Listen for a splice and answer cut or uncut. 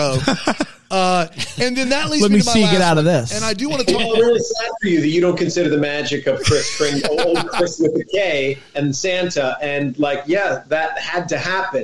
uncut